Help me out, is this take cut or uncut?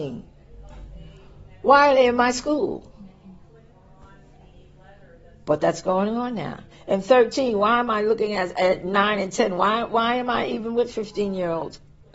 uncut